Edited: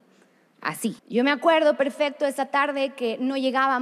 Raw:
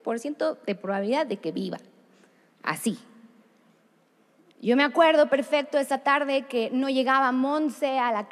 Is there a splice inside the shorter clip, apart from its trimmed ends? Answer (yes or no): yes